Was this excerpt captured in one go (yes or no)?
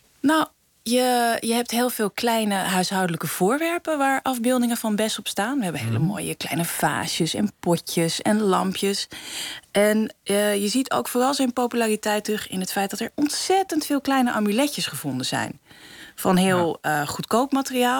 yes